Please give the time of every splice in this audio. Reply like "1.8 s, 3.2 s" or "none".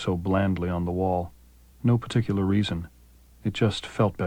1.7 s

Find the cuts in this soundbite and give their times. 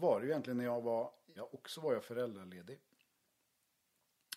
1.4 s

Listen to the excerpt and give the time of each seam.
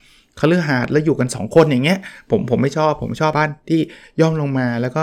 3.3 s

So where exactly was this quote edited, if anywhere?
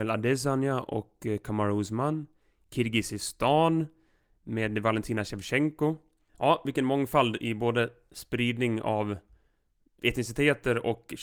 6.3 s

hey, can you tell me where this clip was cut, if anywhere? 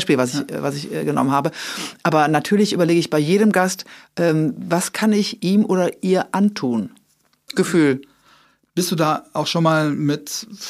7.5 s

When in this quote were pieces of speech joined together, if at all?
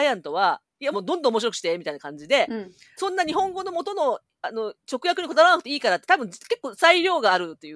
0.9 s, 3.0 s

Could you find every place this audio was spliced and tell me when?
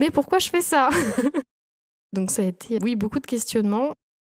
2.8 s

